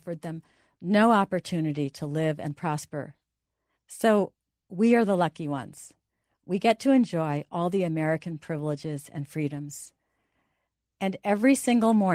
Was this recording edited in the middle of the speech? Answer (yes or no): yes